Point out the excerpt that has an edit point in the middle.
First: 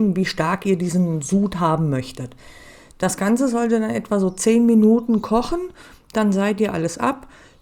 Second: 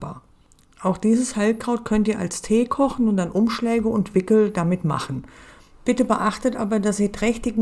second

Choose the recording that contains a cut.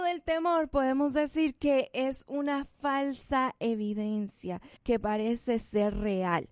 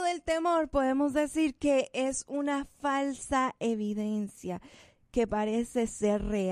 first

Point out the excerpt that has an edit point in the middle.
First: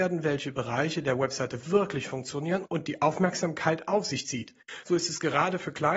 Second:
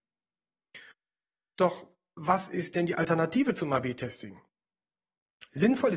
first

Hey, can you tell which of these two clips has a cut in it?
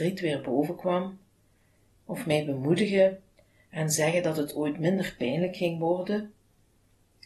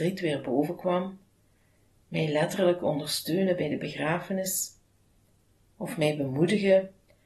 first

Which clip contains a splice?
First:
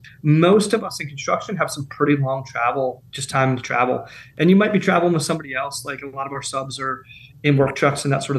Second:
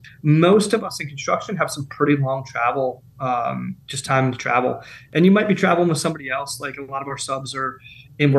first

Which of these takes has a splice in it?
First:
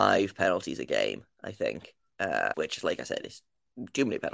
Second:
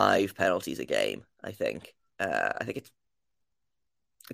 first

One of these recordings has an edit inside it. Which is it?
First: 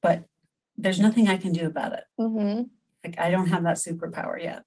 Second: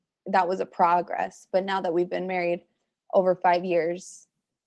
first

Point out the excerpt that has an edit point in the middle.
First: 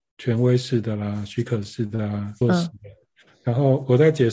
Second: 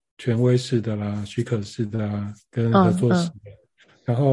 first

